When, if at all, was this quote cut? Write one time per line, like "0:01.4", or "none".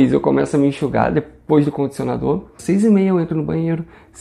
0:02.6